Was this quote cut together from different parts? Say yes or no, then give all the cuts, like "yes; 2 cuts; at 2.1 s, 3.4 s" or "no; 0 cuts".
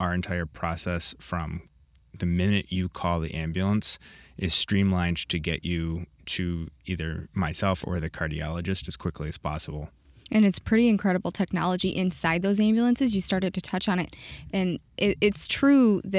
yes; 1 cut; at 7.8 s